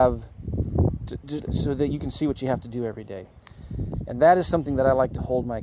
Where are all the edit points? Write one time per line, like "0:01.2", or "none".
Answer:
0:01.4